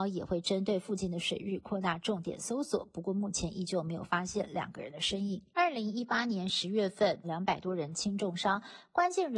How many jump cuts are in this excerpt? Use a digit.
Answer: 2